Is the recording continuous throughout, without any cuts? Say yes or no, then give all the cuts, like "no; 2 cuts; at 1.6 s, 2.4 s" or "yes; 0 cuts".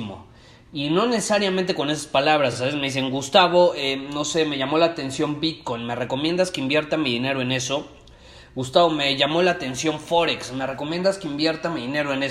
yes; 0 cuts